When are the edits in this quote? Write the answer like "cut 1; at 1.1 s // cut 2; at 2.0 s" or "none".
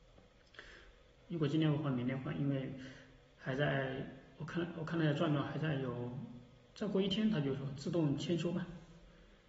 cut 1; at 1.2 s

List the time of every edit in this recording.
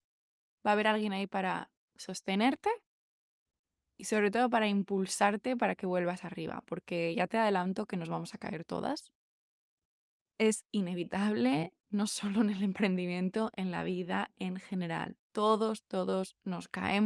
none

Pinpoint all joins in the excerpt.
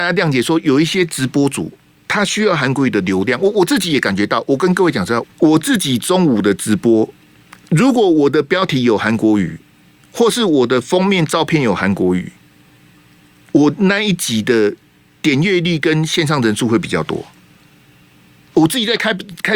cut 1; at 5.2 s

